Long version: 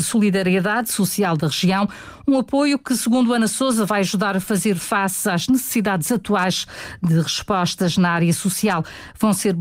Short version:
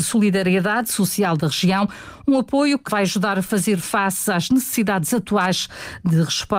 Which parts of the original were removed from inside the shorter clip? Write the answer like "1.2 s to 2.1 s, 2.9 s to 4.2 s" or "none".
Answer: 2.9 s to 3.9 s